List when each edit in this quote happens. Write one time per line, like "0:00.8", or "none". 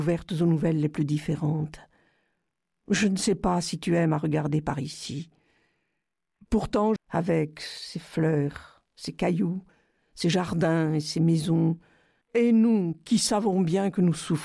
0:07.0
0:12.2